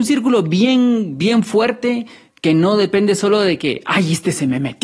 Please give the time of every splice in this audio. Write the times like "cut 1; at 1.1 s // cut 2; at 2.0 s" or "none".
none